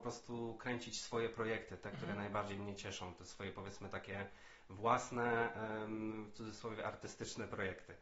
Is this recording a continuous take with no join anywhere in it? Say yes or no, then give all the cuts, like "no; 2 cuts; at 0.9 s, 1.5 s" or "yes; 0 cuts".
yes; 0 cuts